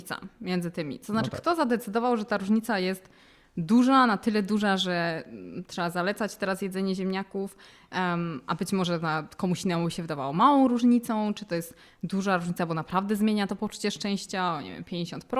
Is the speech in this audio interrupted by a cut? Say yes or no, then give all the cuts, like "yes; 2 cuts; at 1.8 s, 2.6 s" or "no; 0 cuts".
no; 0 cuts